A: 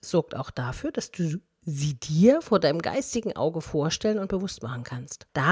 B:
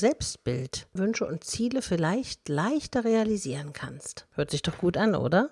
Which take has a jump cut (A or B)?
B